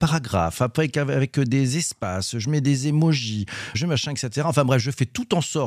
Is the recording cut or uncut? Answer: cut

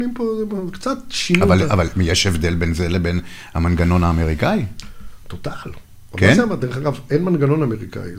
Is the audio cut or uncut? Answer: uncut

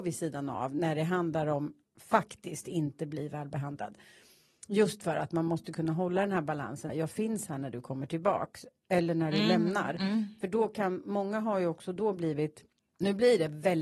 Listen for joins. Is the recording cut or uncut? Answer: cut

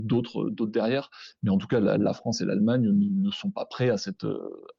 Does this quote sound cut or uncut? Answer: uncut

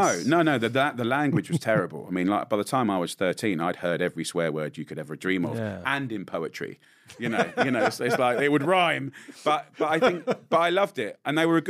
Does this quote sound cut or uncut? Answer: uncut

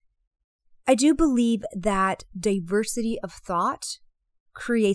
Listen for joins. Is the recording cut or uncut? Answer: uncut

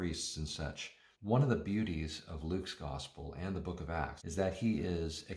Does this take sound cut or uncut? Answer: cut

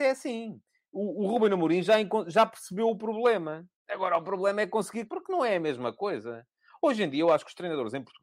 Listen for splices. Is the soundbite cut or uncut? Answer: cut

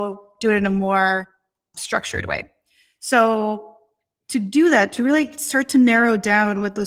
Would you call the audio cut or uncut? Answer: uncut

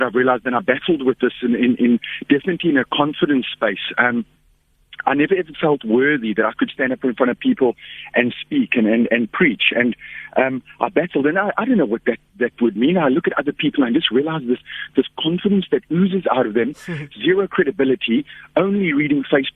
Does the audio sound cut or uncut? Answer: uncut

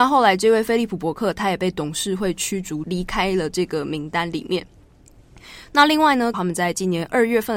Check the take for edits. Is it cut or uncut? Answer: cut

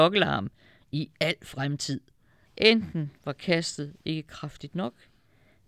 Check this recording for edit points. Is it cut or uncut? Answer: cut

